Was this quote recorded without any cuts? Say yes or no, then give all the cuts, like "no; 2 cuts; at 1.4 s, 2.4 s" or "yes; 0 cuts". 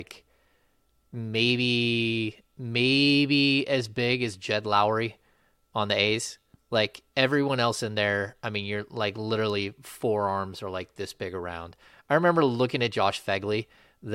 yes; 0 cuts